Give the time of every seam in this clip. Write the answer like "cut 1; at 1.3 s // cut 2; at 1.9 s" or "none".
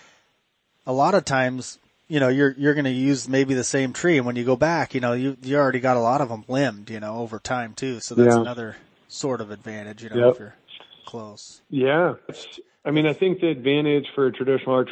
cut 1; at 12.3 s